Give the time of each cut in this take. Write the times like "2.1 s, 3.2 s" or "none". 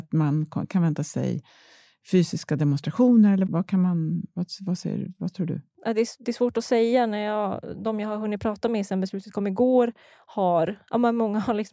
3.5 s

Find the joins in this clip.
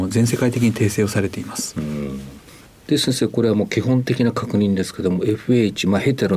none

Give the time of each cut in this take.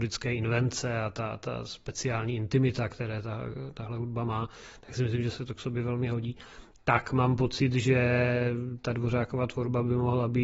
none

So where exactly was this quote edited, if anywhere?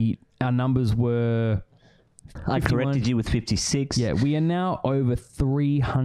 2.4 s

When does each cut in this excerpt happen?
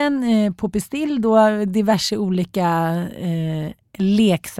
none

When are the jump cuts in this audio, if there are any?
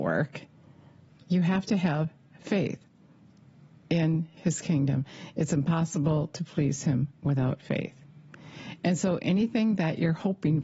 1.1 s

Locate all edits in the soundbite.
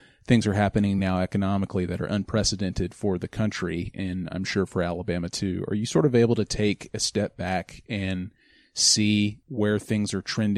none

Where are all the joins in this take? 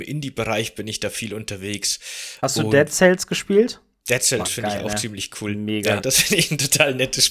4.0 s, 6.0 s

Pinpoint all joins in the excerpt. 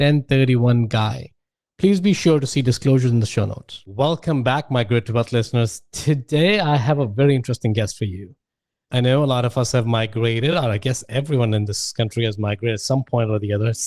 none

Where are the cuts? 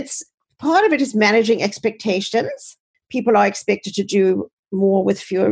2.9 s

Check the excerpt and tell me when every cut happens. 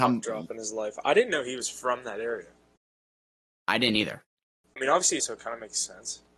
5.2 s

